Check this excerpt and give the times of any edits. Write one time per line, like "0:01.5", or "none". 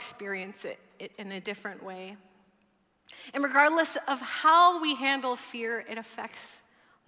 none